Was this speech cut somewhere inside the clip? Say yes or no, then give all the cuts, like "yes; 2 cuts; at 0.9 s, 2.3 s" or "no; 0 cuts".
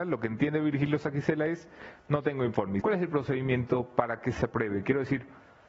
yes; 1 cut; at 2.8 s